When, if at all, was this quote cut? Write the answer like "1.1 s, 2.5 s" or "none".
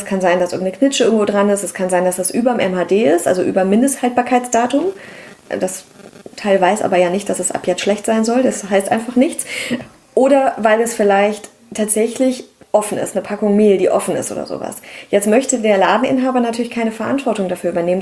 none